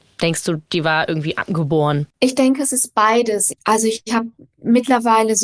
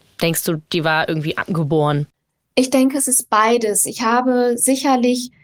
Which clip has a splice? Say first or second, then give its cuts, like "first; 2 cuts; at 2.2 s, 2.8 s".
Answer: first; 2 cuts; at 2.1 s, 3.5 s